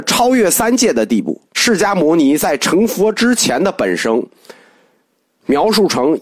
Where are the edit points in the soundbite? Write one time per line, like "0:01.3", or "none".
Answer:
0:01.5